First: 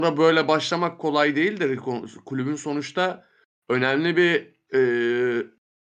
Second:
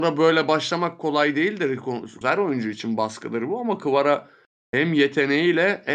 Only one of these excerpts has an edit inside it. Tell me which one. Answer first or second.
second